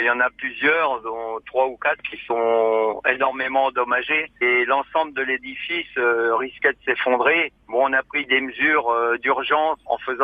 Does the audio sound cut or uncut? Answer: uncut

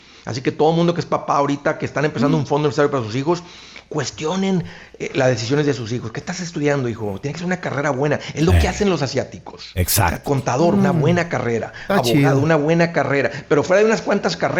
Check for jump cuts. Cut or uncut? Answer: uncut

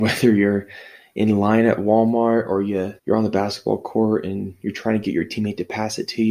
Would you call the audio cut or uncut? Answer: cut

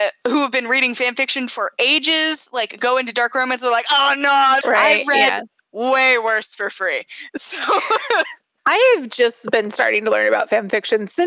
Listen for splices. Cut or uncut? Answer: cut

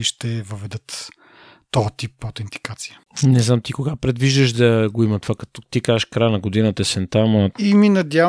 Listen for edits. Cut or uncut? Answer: uncut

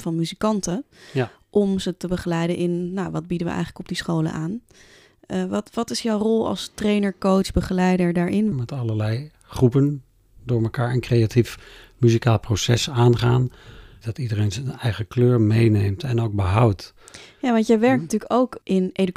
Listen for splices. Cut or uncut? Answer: cut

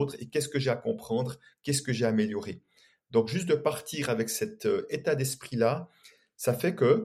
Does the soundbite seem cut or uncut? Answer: uncut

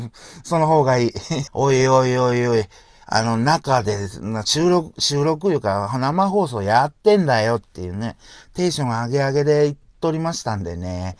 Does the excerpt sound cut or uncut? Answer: cut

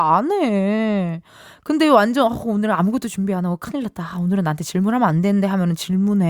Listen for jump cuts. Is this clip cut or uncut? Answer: uncut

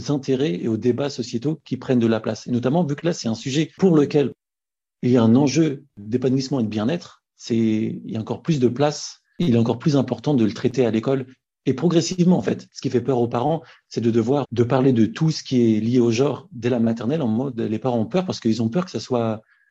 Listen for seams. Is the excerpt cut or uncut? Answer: cut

